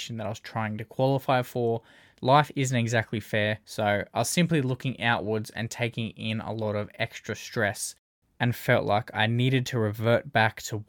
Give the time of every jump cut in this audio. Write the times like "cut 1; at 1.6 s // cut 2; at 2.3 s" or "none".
cut 1; at 2.1 s // cut 2; at 3.6 s